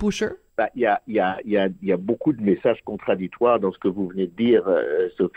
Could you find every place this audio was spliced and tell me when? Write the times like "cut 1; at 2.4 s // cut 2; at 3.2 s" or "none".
none